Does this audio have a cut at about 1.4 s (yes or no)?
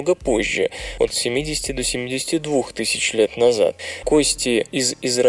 no